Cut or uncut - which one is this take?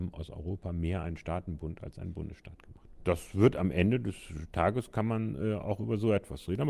cut